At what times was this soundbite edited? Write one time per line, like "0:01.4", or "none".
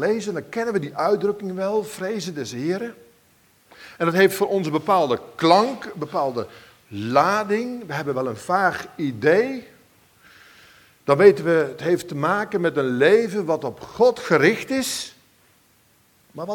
none